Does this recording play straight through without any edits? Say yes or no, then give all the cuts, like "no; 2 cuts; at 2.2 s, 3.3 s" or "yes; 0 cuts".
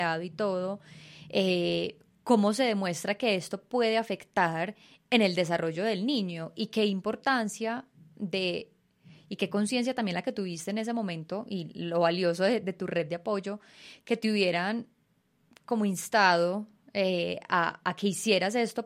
yes; 0 cuts